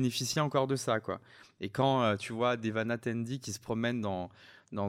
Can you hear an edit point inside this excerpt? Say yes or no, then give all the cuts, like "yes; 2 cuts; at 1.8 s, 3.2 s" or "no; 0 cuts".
no; 0 cuts